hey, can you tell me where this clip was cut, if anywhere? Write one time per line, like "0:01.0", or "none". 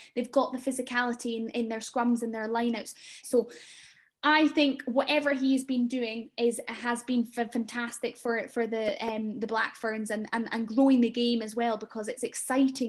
0:03.2